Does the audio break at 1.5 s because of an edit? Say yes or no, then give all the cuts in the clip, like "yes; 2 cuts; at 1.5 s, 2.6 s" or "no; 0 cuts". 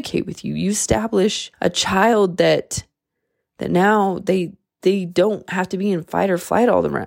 yes; 1 cut; at 1.5 s